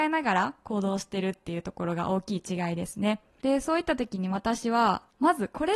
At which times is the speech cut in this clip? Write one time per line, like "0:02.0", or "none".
0:03.4